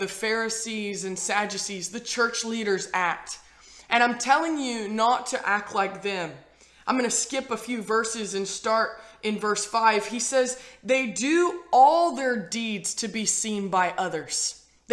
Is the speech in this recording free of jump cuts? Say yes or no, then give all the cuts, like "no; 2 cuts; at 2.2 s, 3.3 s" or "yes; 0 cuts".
yes; 0 cuts